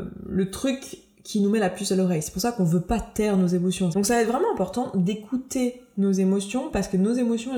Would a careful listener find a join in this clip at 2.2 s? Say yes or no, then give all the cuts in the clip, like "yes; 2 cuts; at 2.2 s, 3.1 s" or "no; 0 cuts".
no; 1 cut; at 3.9 s